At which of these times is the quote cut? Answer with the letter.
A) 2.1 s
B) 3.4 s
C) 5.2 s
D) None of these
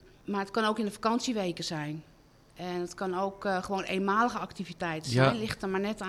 D